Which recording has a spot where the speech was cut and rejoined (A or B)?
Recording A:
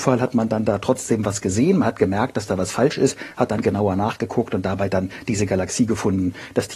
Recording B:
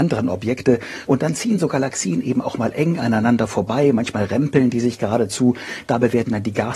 B